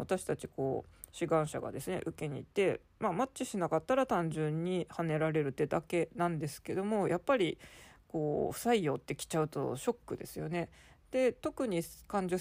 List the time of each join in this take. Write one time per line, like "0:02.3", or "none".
none